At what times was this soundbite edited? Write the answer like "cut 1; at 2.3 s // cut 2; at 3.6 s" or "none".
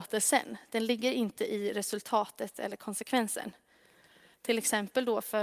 cut 1; at 4.3 s